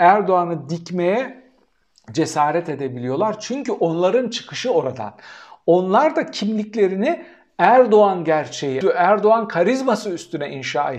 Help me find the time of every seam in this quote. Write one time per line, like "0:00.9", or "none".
0:08.8